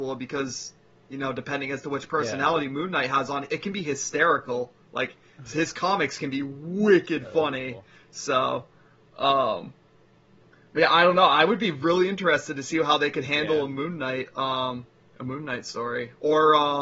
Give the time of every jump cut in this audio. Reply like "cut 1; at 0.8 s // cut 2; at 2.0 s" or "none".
none